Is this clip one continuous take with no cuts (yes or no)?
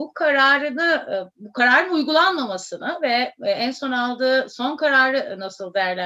yes